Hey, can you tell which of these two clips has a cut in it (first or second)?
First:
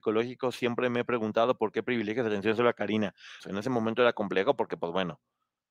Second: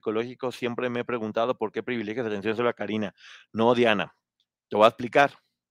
first